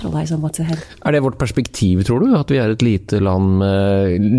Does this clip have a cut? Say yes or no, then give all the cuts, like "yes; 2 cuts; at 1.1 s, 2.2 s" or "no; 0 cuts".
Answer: no; 0 cuts